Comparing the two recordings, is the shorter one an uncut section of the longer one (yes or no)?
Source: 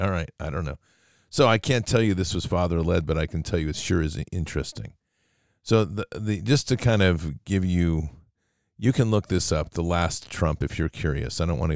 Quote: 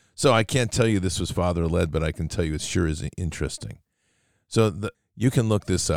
no